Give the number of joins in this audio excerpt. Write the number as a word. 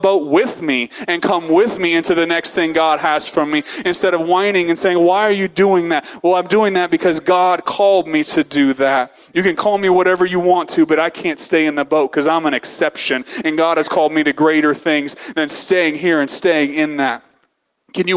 zero